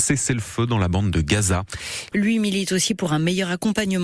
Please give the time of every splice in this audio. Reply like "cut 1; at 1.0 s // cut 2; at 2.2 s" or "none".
cut 1; at 2.1 s